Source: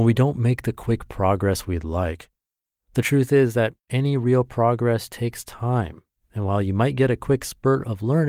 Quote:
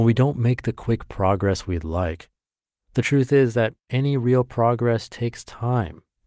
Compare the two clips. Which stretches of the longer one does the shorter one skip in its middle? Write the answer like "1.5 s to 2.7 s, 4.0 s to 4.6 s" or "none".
none